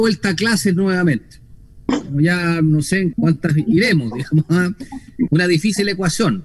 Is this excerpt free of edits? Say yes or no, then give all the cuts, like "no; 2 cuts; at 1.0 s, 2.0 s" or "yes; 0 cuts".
no; 2 cuts; at 3.1 s, 5.3 s